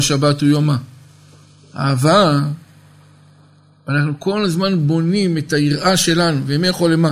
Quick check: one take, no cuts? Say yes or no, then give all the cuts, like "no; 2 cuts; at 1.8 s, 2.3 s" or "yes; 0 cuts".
yes; 0 cuts